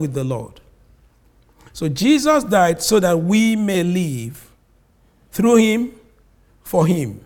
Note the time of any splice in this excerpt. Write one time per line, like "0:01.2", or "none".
none